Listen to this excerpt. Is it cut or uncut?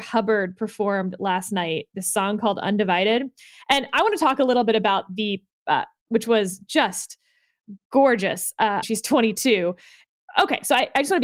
cut